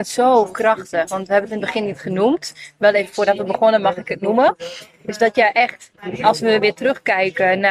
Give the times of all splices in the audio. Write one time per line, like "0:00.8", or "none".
none